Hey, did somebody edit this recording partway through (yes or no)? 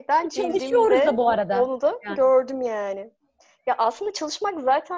no